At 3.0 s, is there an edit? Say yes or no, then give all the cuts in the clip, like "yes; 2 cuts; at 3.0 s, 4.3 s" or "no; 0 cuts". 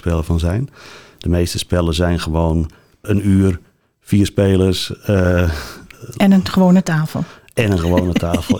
yes; 1 cut; at 3.0 s